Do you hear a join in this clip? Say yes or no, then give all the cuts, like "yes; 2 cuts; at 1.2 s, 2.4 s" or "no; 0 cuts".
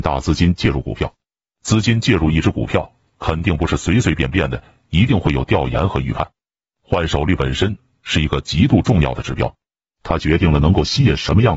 no; 0 cuts